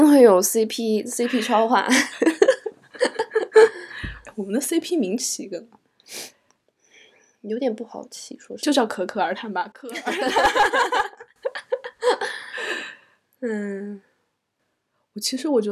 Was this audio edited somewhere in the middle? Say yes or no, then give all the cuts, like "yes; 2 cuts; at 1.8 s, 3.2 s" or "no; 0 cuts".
yes; 1 cut; at 9.7 s